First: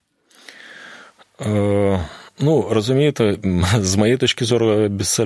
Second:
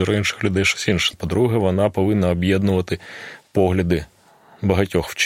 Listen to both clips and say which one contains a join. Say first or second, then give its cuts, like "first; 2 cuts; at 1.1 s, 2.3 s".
second; 1 cut; at 1.1 s